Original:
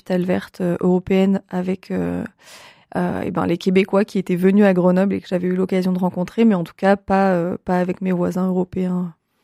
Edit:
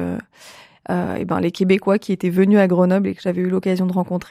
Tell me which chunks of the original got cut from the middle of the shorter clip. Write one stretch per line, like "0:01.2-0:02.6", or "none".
none

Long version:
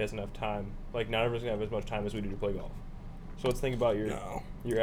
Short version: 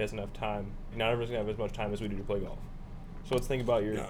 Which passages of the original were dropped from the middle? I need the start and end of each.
0:00.9-0:01.0

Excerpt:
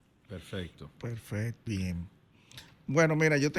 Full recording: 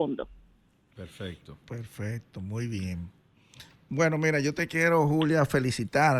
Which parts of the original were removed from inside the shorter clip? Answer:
0:02.3-0:02.7

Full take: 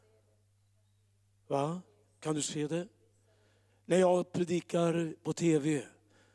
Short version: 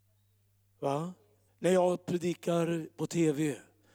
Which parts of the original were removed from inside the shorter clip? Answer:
0:02.2-0:03.7

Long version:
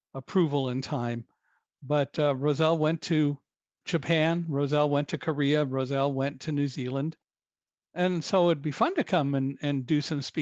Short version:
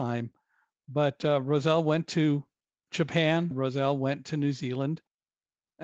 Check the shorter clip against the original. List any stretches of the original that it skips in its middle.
0:04.5-0:05.7

